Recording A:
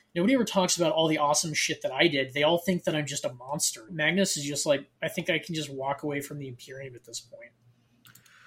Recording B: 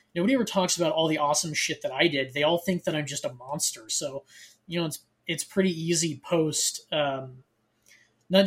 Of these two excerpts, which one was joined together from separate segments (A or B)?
A